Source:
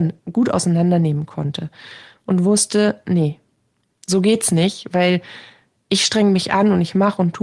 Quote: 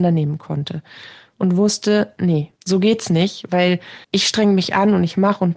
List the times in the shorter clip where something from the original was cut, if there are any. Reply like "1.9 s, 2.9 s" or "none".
2.6 s, 4.0 s